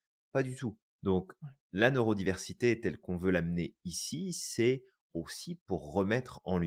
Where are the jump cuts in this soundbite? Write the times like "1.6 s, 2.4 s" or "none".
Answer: 1.0 s